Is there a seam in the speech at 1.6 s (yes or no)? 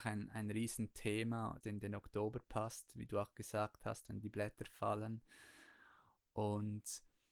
yes